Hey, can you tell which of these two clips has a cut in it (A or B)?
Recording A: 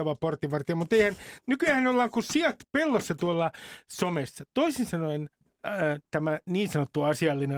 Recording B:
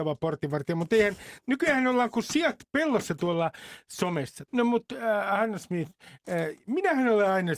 B